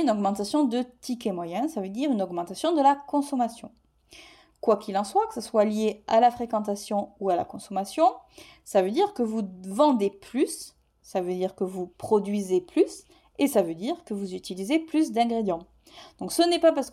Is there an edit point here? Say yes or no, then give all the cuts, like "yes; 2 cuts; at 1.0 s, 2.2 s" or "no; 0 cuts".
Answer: no; 0 cuts